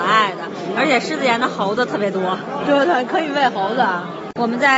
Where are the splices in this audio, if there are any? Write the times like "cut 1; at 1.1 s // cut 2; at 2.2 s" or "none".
none